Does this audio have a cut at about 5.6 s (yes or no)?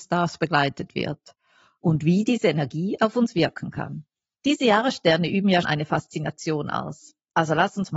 yes